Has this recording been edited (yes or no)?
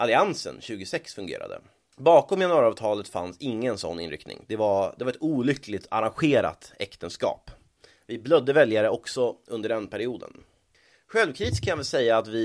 no